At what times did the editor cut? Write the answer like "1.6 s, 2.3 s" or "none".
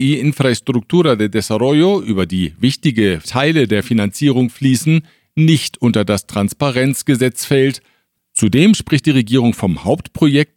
none